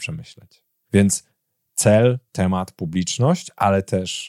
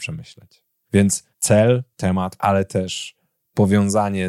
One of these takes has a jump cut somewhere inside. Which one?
second; 2 cuts; at 1.3 s, 2.4 s

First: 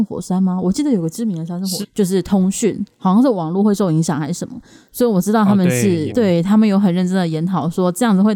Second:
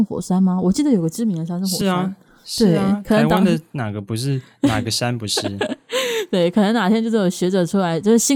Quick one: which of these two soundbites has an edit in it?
first; 2 cuts; at 1.8 s, 6.1 s

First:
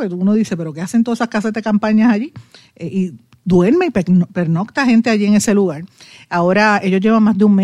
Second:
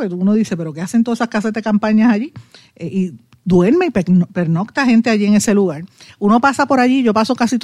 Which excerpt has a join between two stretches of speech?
second; 1 cut; at 6.1 s

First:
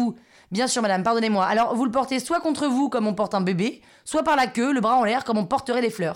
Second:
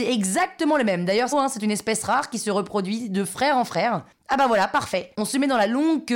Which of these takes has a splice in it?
second; 2 cuts; at 1.3 s, 5.1 s

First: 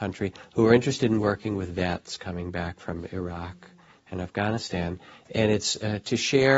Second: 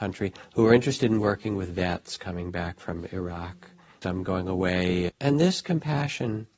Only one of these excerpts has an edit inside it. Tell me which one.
second; 2 cuts; at 4.0 s, 5.1 s

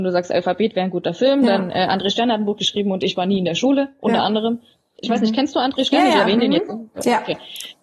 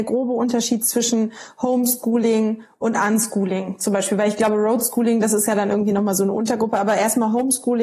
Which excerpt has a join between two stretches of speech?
first; 1 cut; at 5.0 s

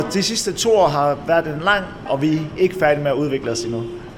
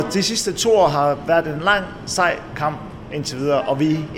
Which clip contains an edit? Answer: first; 1 cut; at 2.1 s

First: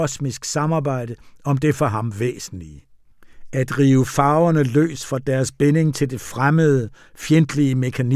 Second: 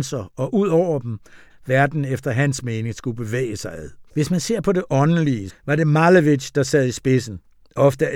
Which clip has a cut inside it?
second; 3 cuts; at 1.5 s, 4.1 s, 5.5 s

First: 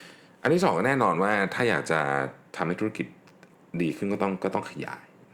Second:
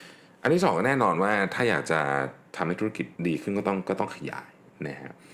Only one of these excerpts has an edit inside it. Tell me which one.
second; 1 cut; at 3.2 s

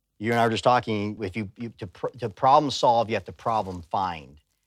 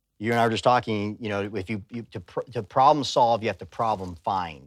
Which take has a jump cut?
first; 1 cut; at 1.2 s

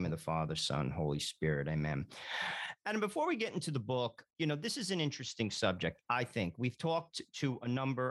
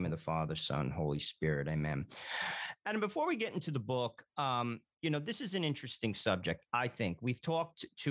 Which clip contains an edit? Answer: first; 1 cut; at 4.3 s

